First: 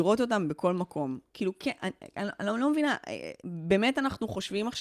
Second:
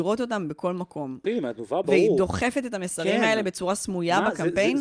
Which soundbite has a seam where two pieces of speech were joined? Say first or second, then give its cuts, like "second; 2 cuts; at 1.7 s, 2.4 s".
second; 1 cut; at 1.2 s